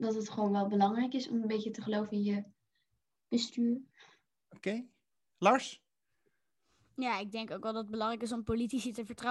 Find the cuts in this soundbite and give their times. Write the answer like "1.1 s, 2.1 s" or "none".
none